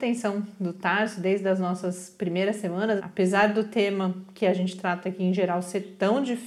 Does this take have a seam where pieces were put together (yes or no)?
yes